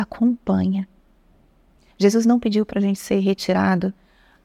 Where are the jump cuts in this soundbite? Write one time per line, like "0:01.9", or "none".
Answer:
0:01.9